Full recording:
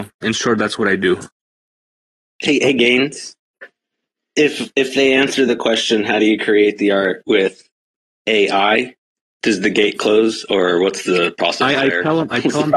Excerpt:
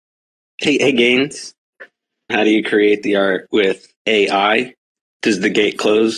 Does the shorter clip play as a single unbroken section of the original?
no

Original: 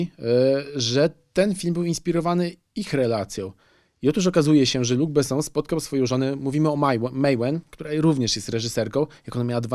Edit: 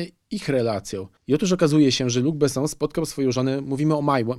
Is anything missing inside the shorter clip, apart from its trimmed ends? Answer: yes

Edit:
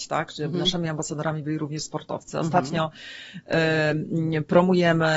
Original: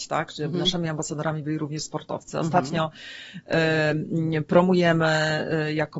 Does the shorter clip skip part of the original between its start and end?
no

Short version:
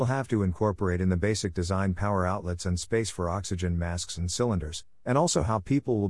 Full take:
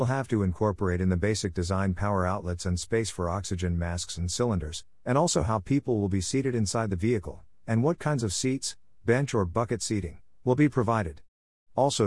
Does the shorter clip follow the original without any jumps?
yes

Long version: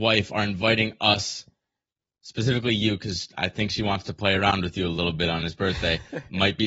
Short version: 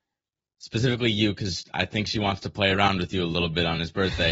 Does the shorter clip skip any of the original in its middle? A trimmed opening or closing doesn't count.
no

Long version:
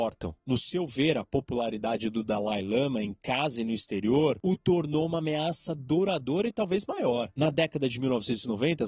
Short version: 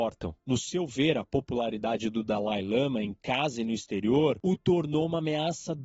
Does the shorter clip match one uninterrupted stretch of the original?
yes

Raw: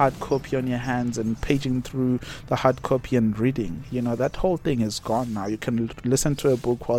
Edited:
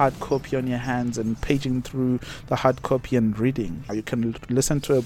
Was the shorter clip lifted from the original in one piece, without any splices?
no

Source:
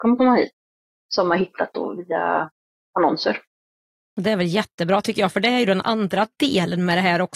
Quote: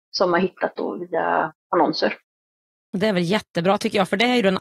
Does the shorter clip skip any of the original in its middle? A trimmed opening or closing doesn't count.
yes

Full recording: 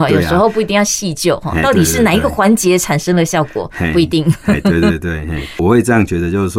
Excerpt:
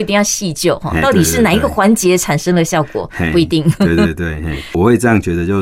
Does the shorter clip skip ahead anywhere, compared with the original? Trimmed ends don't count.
yes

